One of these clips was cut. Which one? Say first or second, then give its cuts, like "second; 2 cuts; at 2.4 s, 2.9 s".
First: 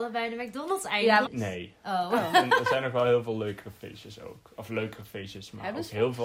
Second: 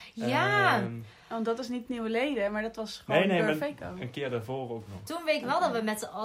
first; 1 cut; at 1.2 s